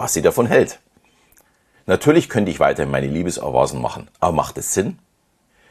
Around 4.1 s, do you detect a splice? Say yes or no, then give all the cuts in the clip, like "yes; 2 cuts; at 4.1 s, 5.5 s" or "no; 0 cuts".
yes; 2 cuts; at 1.7 s, 4.1 s